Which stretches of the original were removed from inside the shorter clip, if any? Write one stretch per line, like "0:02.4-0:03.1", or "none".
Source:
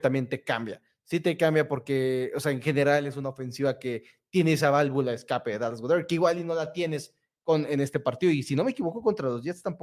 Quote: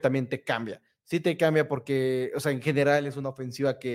none